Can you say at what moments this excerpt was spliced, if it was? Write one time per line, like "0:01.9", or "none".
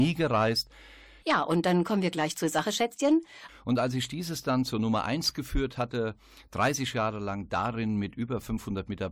0:01.2
0:03.5